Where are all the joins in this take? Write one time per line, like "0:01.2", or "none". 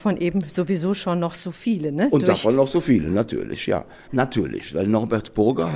0:04.1

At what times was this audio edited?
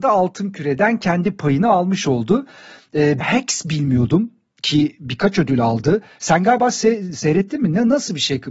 0:03.2

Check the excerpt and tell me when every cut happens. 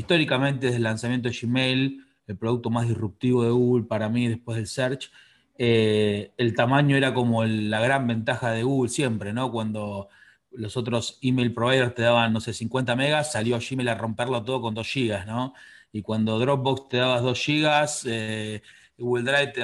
none

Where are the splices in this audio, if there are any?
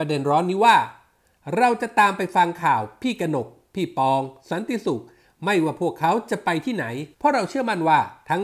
0:07.1

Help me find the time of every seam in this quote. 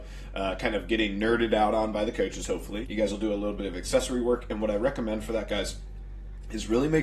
0:02.8

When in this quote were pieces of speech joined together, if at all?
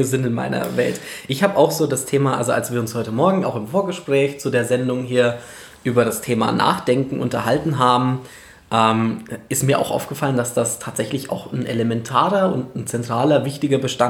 none

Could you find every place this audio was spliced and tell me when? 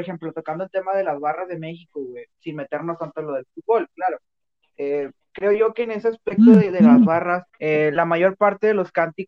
0:07.5

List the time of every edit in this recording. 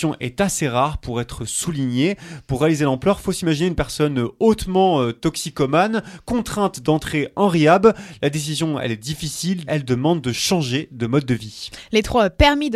0:09.7

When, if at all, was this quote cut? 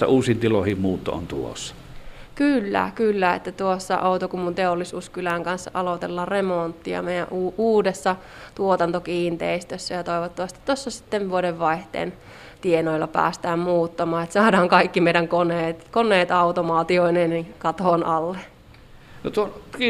none

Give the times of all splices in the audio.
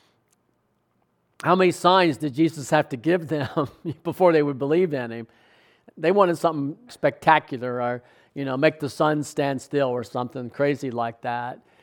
0:06.9

